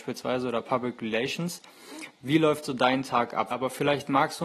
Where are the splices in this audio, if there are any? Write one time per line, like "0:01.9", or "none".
0:03.5